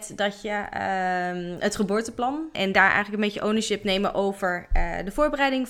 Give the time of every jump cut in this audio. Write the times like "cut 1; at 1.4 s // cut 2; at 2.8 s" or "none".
cut 1; at 2.5 s